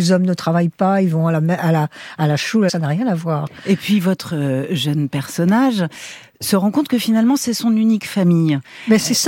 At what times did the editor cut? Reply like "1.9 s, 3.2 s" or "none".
2.7 s